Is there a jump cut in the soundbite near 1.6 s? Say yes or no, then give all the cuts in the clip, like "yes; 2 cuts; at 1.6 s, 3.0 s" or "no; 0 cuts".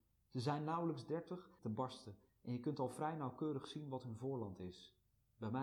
yes; 1 cut; at 1.6 s